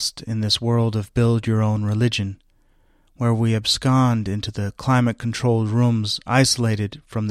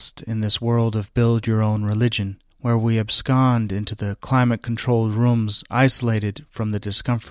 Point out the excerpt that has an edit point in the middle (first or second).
second